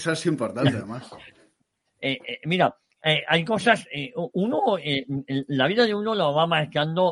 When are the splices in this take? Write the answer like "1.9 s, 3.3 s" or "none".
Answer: 1.9 s